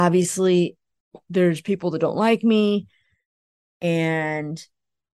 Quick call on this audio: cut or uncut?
cut